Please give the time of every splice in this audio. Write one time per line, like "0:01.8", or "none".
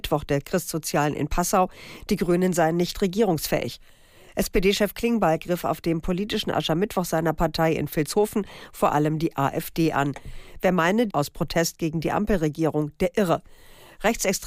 0:11.1